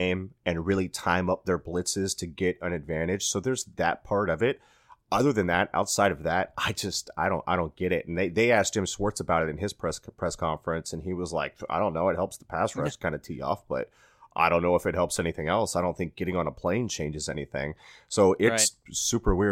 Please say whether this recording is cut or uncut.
uncut